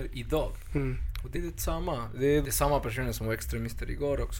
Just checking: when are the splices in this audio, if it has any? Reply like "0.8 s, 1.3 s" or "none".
1.3 s, 2.4 s